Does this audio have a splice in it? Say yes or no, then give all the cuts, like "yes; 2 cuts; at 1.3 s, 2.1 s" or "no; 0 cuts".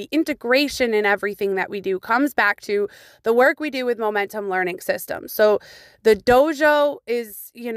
no; 0 cuts